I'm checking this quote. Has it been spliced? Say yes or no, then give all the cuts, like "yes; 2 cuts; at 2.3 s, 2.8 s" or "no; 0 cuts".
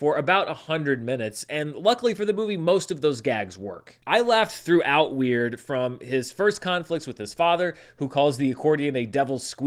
no; 0 cuts